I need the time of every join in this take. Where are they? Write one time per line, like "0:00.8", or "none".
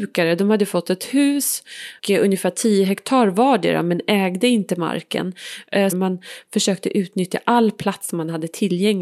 0:02.0
0:05.9